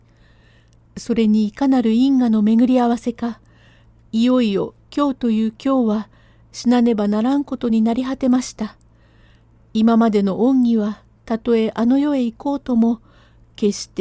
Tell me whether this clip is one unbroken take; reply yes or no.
no